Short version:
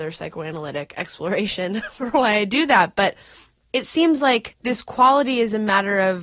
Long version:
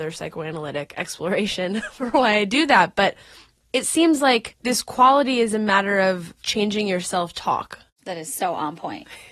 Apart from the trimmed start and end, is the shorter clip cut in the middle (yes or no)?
no